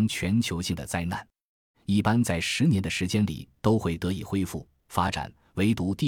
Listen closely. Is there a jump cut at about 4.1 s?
no; 1 cut; at 1.7 s

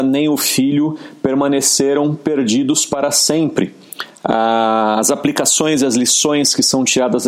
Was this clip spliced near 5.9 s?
no; 1 cut; at 4.2 s

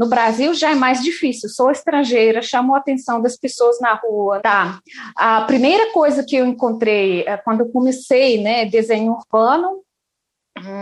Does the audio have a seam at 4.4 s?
yes; 1 cut; at 4.4 s

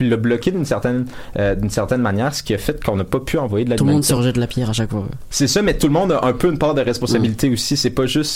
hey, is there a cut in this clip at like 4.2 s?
no; 0 cuts

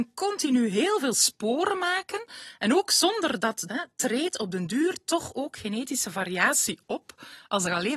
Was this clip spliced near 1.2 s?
no; 1 cut; at 3.7 s

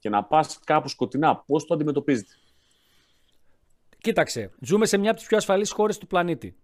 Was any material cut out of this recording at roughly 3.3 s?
no; 1 cut; at 4.6 s

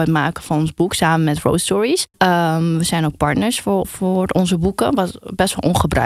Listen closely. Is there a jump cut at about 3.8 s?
yes; 2 cuts; at 2.1 s, 3.8 s

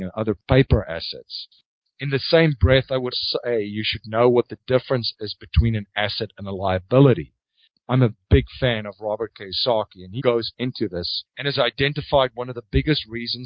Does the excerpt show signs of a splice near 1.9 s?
no; 2 cuts; at 3.1 s, 10.2 s

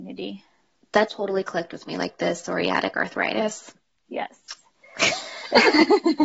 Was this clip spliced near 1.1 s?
yes; 1 cut; at 1.1 s

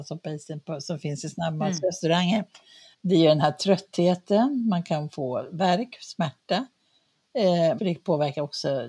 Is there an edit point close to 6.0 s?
no; 2 cuts; at 2.9 s, 7.8 s

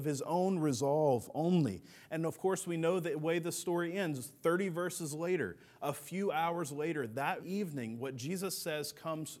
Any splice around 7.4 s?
yes; 1 cut; at 7.4 s

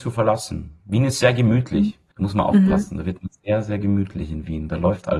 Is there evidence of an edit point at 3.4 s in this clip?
no; 1 cut; at 2.1 s

